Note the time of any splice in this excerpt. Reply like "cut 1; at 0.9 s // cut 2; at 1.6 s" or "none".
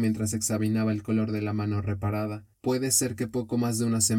cut 1; at 2.5 s